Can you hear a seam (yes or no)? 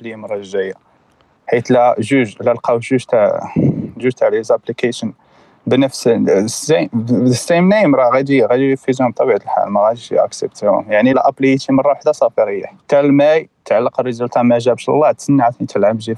yes